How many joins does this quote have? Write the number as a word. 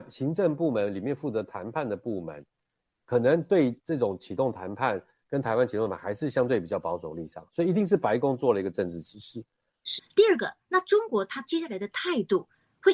one